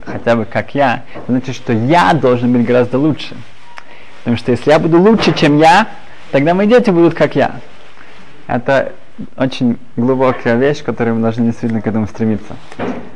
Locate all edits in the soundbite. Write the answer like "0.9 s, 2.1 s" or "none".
none